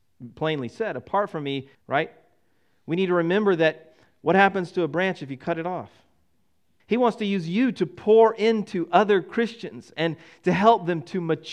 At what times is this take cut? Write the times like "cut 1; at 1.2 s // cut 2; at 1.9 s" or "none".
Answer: cut 1; at 1.7 s // cut 2; at 6.8 s